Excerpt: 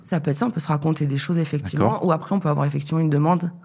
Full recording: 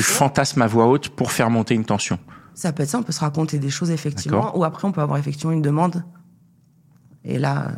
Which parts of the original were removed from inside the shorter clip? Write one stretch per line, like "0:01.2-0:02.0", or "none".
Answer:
none